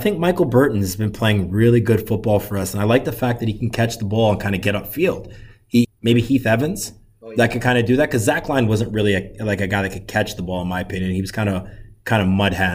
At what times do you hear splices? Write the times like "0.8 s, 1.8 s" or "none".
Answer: 5.8 s

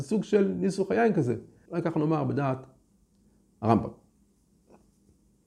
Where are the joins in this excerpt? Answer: 1.7 s

